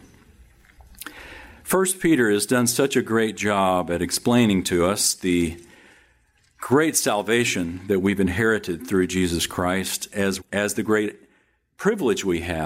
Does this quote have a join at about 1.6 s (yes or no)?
no